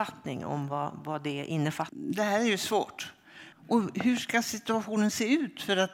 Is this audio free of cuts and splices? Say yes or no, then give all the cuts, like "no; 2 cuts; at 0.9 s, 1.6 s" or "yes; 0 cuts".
no; 2 cuts; at 1.9 s, 3.5 s